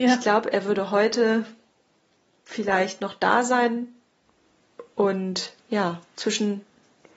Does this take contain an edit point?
yes; 1 cut; at 5.6 s

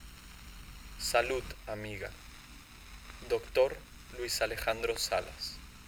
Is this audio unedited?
no; 1 cut; at 1.0 s

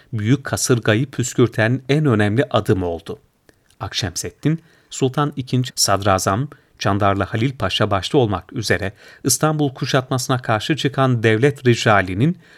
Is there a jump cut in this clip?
yes; 1 cut; at 5.7 s

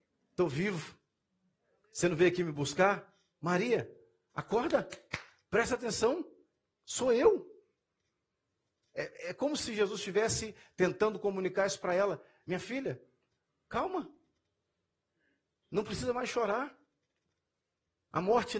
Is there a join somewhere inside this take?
no; 0 cuts

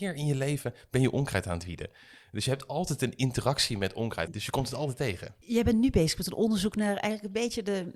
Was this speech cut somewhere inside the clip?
yes; 1 cut; at 4.3 s

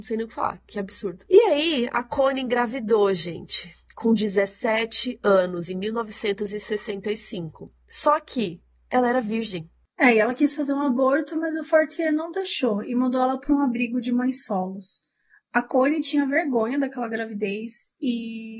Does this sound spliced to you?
no; 0 cuts

